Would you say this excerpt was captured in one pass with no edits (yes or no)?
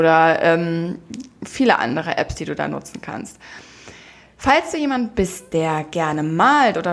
yes